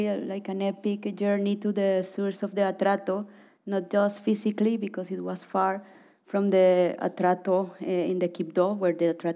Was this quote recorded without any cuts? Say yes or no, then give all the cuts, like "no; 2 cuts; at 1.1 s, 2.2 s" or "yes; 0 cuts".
yes; 0 cuts